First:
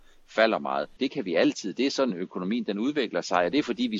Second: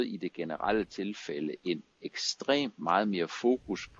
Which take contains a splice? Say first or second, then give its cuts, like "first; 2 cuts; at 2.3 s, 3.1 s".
first; 1 cut; at 1.0 s